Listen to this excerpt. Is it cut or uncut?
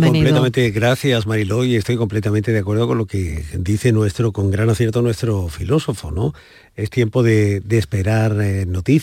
uncut